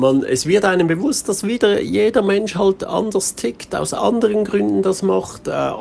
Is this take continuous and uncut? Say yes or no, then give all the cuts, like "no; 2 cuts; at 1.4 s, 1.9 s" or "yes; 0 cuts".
yes; 0 cuts